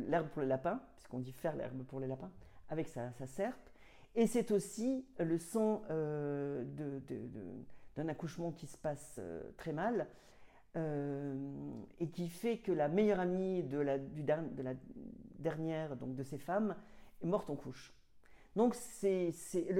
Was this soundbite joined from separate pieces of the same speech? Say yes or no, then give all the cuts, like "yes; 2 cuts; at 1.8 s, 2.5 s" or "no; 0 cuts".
no; 0 cuts